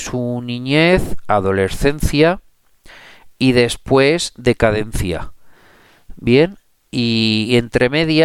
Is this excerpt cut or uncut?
uncut